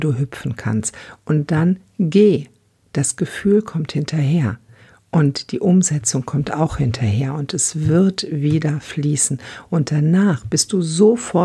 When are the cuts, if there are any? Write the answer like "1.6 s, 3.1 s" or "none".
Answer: none